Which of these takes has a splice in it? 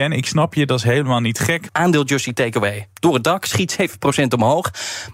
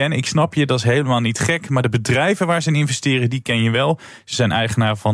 first; 2 cuts; at 1.7 s, 2.9 s

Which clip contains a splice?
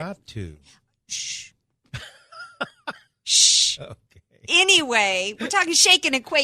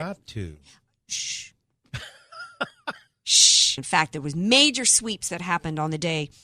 second; 1 cut; at 3.8 s

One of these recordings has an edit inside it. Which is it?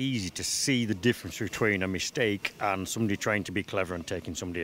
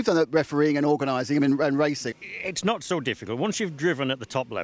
second; 1 cut; at 2.1 s

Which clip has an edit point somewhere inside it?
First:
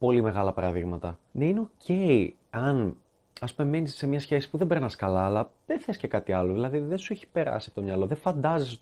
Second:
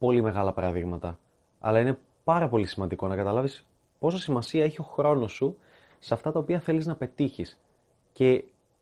first; 1 cut; at 1.3 s

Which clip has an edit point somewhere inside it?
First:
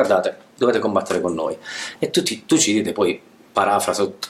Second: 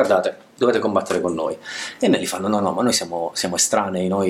first; 1 cut; at 2.0 s

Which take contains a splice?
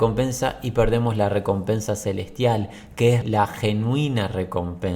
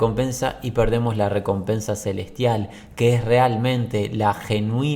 first; 1 cut; at 3.2 s

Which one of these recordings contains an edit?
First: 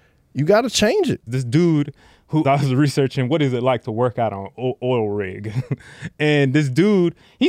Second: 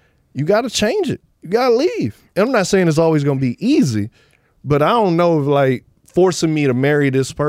first; 2 cuts; at 1.3 s, 2.4 s

